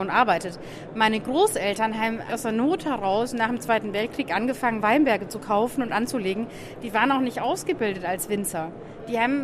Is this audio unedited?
no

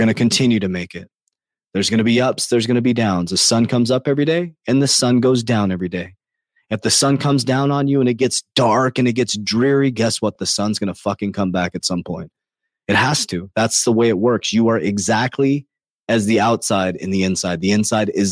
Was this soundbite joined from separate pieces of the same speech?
no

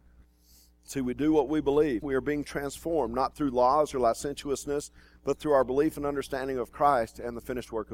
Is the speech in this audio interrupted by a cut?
yes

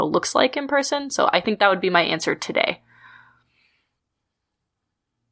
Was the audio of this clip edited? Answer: no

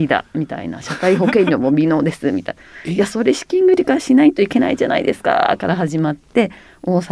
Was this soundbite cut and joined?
no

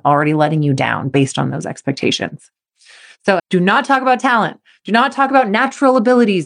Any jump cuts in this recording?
yes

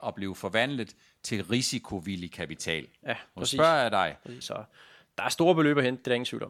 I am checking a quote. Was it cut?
yes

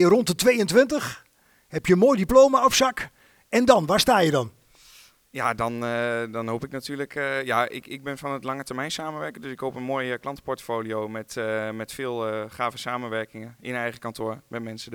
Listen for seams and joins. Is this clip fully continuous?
yes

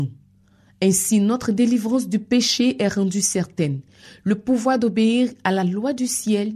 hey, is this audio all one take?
yes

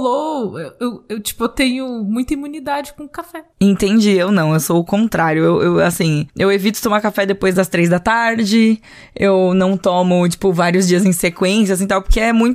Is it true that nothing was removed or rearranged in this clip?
yes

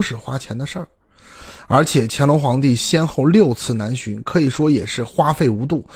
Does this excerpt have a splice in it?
no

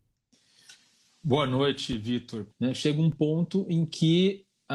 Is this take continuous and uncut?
no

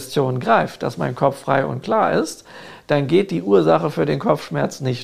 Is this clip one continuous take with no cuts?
yes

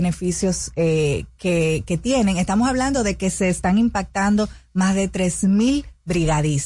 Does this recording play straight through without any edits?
yes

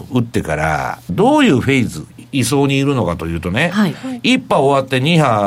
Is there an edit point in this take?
yes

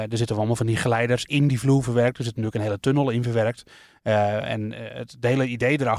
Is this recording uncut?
yes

